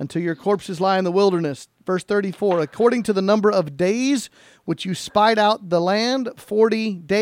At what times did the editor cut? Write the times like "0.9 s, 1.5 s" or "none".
none